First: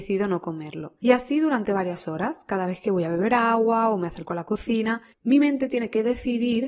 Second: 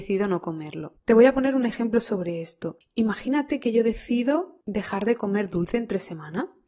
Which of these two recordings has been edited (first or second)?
second